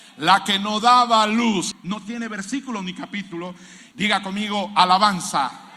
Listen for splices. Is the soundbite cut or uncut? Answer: cut